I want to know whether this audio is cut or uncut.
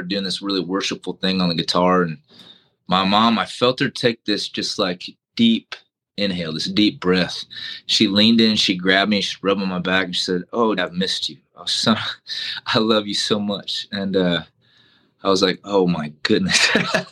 cut